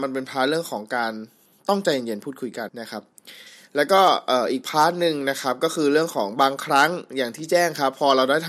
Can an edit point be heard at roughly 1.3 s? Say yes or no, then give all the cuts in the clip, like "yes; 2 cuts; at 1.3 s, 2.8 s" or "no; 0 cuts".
no; 1 cut; at 2.7 s